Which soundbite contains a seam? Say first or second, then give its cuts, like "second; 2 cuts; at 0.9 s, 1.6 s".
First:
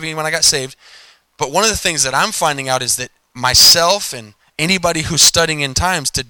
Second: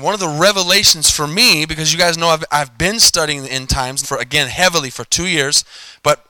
second; 1 cut; at 4.0 s